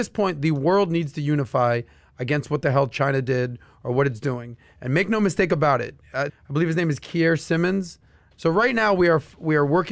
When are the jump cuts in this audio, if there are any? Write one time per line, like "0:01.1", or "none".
0:06.3
0:08.3